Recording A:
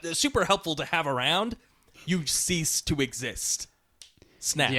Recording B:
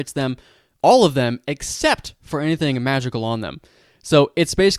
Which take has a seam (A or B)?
A